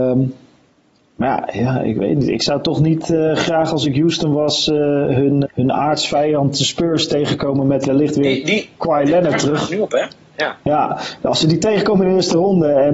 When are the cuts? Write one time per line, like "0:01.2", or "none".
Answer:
0:05.4